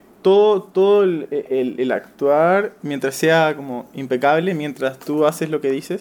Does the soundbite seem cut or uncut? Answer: cut